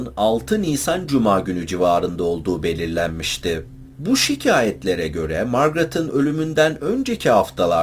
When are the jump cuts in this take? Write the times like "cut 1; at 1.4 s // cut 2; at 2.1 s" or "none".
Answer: cut 1; at 3.9 s